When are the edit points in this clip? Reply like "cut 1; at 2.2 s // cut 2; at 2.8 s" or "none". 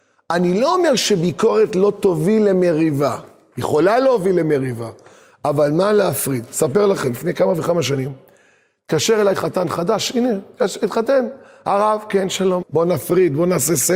cut 1; at 12.6 s